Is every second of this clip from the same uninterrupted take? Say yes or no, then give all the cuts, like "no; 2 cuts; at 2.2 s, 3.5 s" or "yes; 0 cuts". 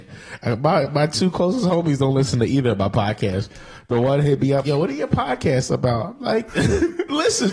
no; 2 cuts; at 4.6 s, 6.5 s